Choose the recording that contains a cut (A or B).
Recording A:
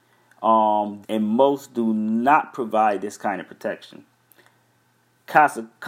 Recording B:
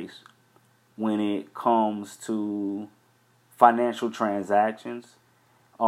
A